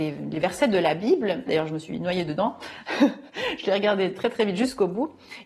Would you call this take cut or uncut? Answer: cut